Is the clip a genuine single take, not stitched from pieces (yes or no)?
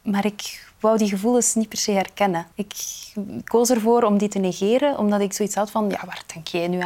no